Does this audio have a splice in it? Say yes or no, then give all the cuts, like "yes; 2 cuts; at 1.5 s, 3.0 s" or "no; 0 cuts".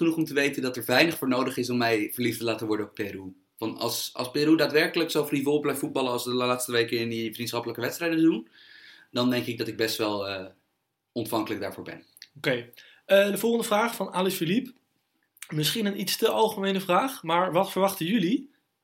no; 0 cuts